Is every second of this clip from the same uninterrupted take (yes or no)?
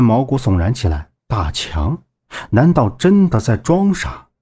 no